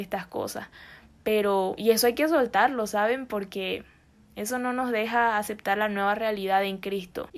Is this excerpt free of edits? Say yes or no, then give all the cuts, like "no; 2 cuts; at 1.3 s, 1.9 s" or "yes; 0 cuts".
yes; 0 cuts